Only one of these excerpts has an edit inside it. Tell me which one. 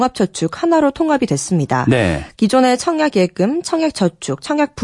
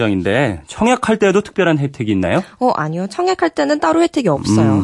first; 1 cut; at 2.3 s

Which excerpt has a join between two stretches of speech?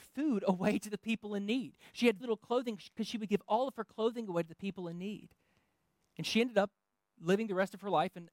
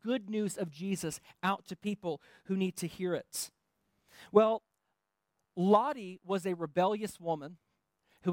first; 1 cut; at 2.2 s

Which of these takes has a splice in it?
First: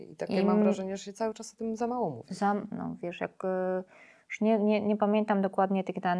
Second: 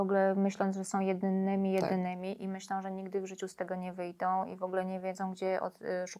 first; 1 cut; at 2.7 s

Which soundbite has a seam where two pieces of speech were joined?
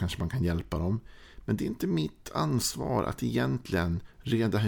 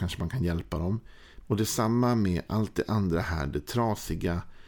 second; 1 cut; at 1.4 s

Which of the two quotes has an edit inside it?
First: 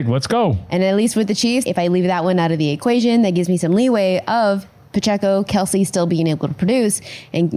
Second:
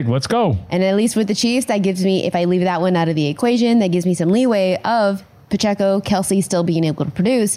first; 1 cut; at 1.7 s

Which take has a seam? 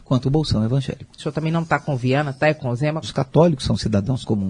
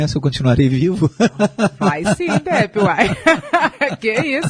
first; 2 cuts; at 1.2 s, 3.0 s

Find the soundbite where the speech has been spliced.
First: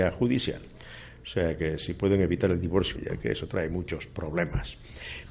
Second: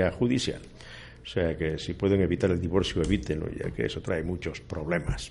first; 1 cut; at 3.0 s

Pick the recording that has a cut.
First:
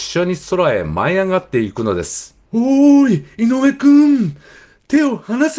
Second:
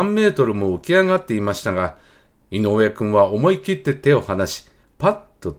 first; 1 cut; at 2.5 s

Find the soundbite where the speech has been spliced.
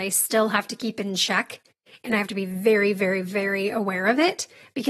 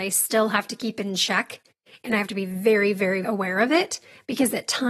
second; 1 cut; at 3.2 s

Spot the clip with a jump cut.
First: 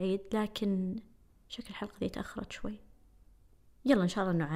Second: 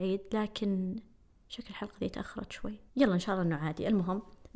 second; 1 cut; at 2.9 s

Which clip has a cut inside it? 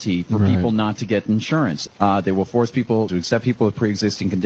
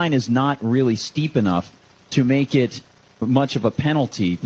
first; 2 cuts; at 1.9 s, 3.1 s

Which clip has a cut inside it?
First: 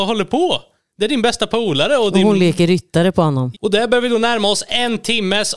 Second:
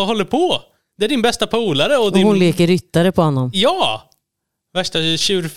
first; 1 cut; at 3.5 s

